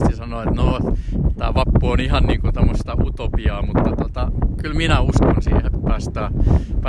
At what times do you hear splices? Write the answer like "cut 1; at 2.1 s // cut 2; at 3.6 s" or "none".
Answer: cut 1; at 5.7 s